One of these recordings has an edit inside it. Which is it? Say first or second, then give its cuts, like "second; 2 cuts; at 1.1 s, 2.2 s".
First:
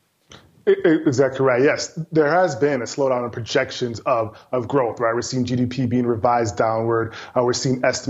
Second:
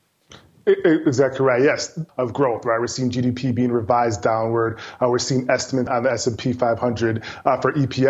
second; 2 cuts; at 2.1 s, 5.9 s